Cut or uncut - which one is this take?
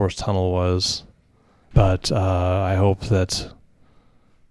cut